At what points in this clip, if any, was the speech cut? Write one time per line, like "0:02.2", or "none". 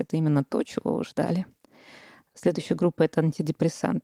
none